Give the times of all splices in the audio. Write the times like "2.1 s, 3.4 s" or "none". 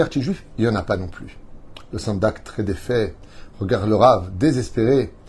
none